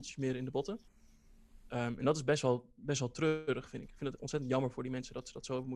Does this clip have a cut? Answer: no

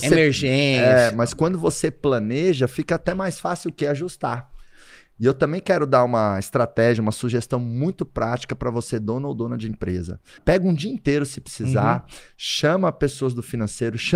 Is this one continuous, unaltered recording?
no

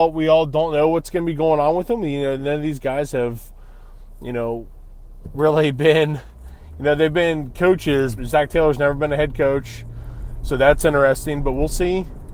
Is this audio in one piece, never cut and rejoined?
no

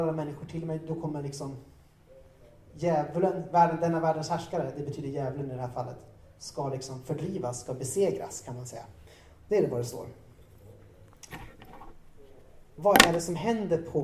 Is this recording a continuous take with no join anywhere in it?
yes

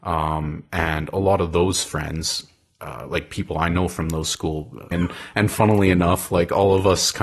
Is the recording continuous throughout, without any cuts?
no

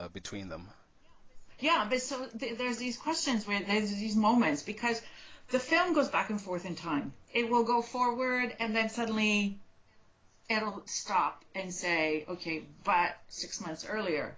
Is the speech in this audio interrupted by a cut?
yes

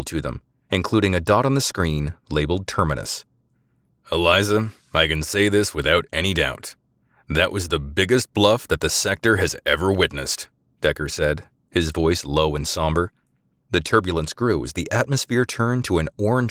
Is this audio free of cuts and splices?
no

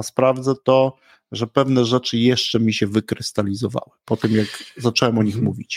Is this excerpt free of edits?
yes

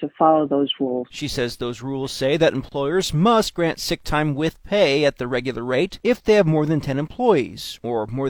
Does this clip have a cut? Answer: no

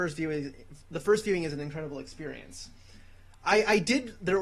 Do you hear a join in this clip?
no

